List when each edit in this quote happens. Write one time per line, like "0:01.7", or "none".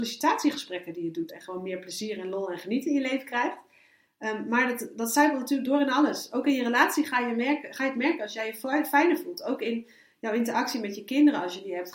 0:01.3